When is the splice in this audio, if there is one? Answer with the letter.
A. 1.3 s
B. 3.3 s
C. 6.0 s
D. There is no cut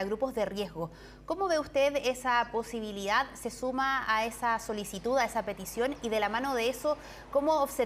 D